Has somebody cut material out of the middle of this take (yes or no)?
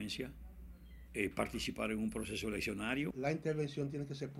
yes